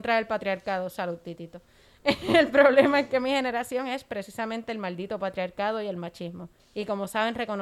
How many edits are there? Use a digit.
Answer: 1